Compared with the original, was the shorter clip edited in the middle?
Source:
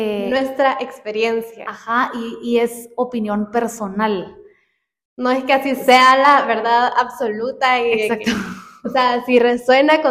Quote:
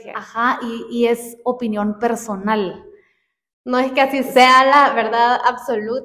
no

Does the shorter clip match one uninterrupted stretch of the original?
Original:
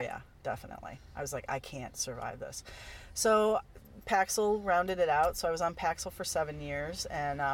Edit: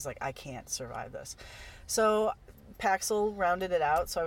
yes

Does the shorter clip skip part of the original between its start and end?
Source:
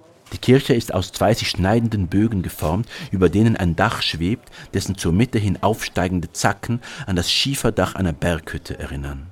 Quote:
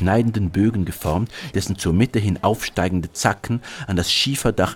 yes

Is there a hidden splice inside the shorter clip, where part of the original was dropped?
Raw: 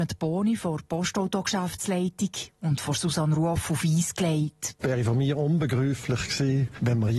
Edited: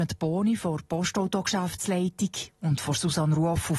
no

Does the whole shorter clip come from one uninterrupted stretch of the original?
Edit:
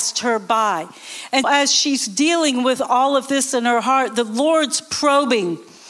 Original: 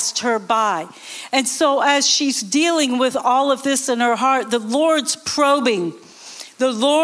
no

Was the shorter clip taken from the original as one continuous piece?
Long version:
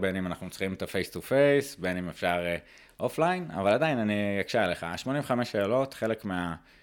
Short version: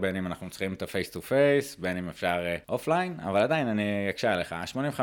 no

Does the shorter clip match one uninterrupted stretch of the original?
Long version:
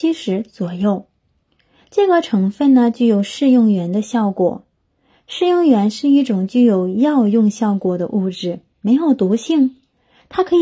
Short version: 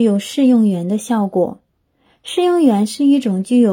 yes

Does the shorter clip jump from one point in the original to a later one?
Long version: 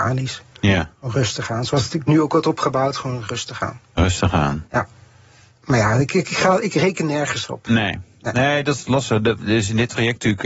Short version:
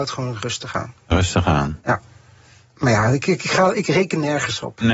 no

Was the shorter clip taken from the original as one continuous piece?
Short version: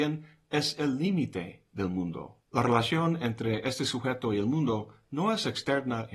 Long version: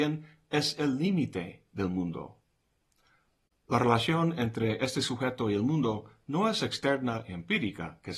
no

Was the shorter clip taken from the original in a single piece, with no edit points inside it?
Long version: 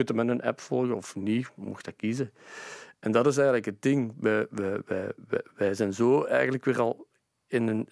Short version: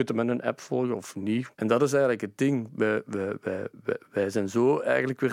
no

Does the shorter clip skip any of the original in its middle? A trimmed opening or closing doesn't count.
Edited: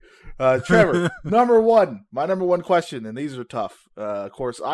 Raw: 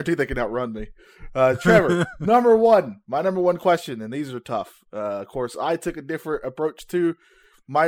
no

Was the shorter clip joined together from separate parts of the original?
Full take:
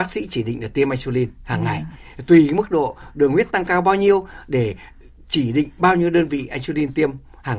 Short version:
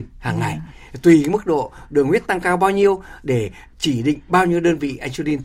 yes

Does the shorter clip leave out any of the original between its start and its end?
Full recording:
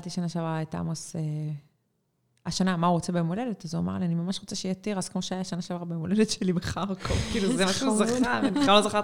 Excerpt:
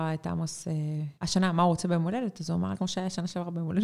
yes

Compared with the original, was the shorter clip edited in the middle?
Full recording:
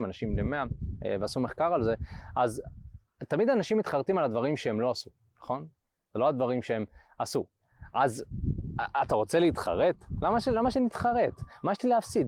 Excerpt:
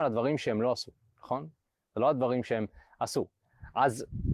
no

